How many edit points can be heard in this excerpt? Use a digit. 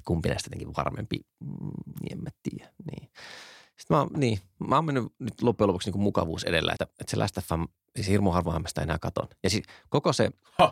1